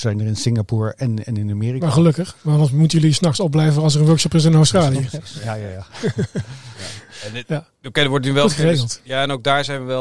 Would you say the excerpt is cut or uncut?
uncut